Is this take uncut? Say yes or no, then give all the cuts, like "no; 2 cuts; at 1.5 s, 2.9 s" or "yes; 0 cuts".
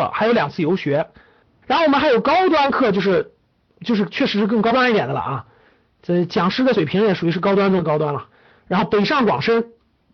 yes; 0 cuts